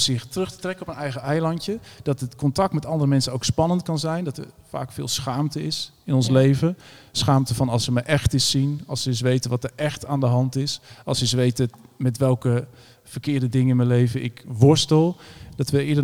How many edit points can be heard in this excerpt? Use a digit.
0